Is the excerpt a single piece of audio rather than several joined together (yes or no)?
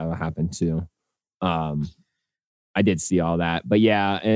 yes